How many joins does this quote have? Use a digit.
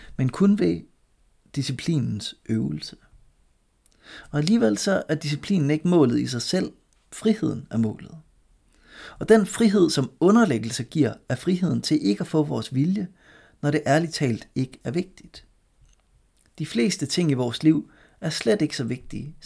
0